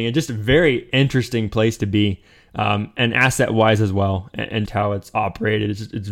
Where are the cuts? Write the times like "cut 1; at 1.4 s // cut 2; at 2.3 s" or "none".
cut 1; at 4.7 s